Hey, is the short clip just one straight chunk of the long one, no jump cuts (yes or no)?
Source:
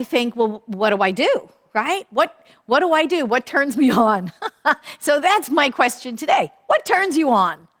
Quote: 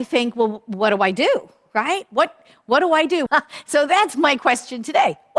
no